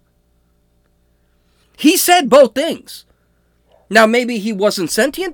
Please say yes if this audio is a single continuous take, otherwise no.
no